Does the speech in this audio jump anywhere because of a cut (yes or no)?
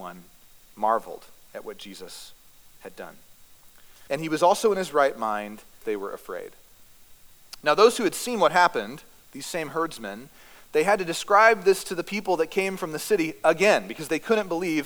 yes